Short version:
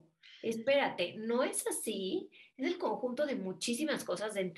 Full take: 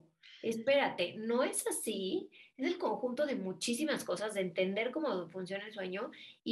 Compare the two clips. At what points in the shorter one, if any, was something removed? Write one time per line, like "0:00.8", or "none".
none

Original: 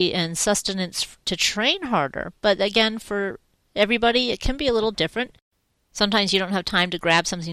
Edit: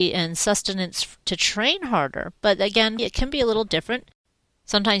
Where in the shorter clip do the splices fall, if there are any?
0:03.0

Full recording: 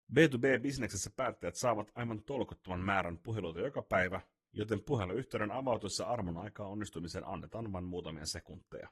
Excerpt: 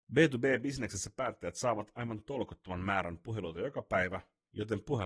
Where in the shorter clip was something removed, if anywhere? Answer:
none

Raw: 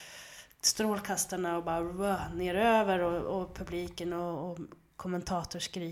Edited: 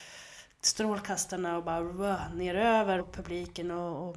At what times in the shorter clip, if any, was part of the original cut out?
0:03.0

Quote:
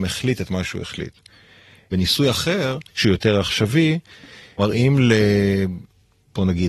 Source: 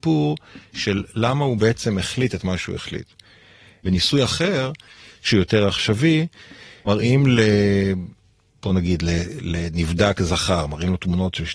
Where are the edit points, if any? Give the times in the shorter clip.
0:02.9

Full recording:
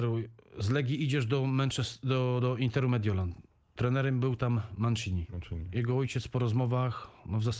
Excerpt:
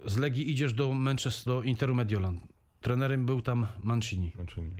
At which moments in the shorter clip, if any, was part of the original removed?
0:01.5

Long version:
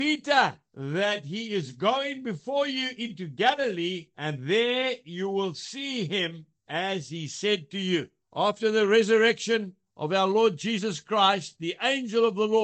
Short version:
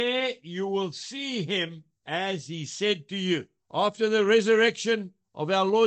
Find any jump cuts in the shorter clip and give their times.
none

